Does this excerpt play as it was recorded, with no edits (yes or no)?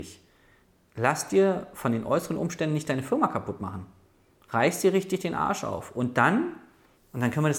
yes